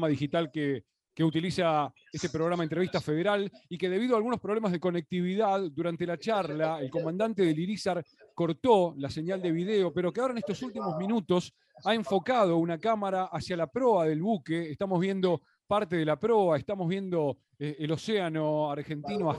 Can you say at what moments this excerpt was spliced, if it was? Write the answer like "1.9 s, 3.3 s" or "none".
none